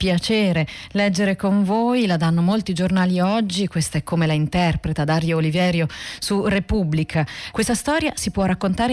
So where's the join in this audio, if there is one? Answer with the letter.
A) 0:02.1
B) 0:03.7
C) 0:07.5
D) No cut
C